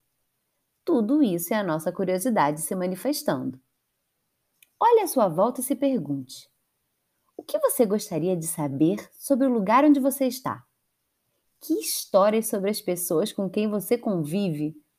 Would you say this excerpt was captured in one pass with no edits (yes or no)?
yes